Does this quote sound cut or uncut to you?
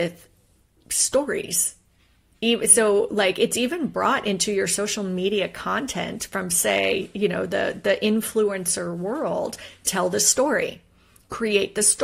uncut